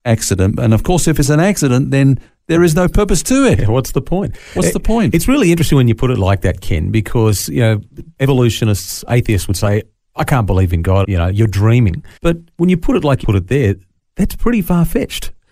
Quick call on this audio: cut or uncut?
cut